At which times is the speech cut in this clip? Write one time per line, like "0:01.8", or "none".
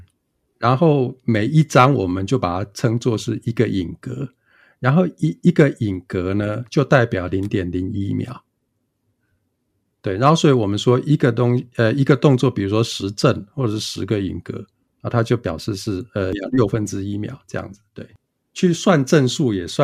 none